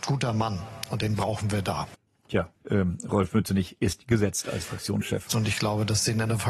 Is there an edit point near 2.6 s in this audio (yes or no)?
yes